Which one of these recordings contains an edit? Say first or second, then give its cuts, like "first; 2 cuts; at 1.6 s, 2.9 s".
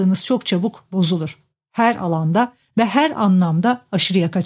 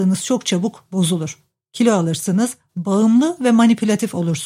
first; 1 cut; at 1.5 s